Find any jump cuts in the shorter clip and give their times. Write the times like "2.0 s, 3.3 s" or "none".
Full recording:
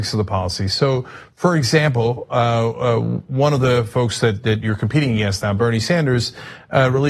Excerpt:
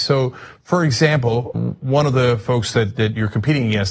1.5 s

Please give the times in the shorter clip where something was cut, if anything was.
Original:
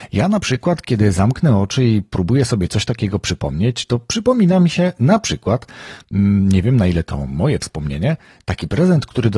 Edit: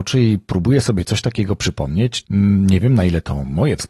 2.2 s

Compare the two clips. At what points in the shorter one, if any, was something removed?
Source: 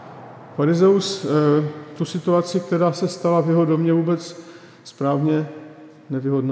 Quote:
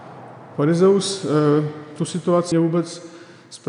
2.5 s

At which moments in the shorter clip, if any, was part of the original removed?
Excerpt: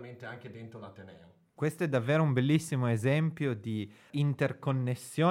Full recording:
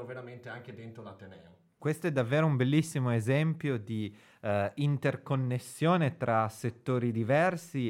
4.1 s

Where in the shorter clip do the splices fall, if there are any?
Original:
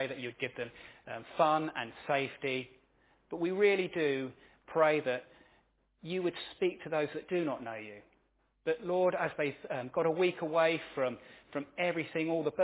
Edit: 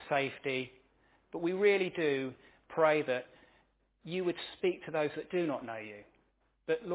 none

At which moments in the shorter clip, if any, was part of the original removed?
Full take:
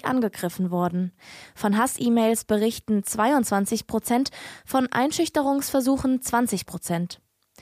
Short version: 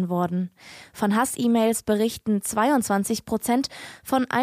none

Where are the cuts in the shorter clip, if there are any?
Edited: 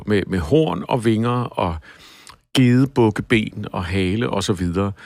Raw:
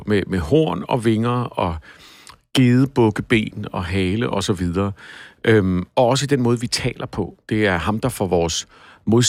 none

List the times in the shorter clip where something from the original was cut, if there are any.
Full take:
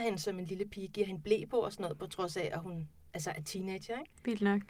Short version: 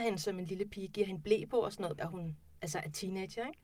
2.0 s

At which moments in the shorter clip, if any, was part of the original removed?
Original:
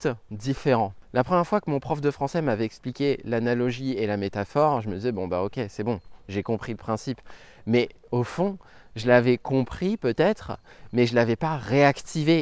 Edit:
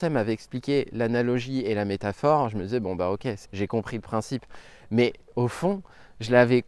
3.4 s

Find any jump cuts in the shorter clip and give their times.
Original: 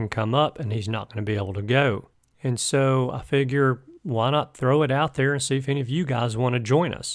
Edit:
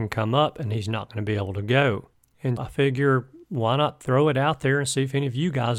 2.6 s

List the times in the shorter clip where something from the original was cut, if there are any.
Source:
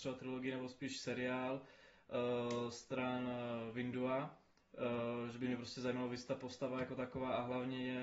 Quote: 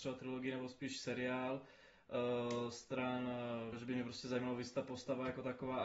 3.7 s

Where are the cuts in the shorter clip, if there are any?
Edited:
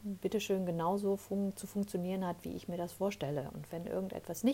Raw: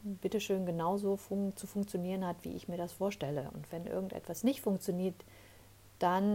none

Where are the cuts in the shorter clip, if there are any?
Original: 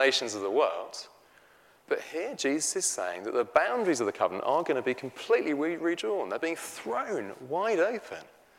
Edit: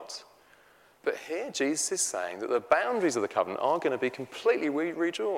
none

